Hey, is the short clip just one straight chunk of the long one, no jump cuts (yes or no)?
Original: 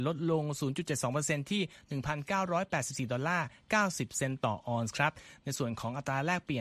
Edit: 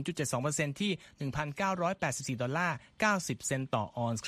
yes